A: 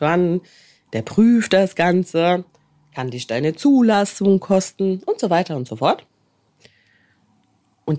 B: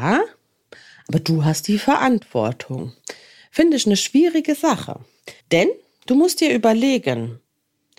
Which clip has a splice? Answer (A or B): B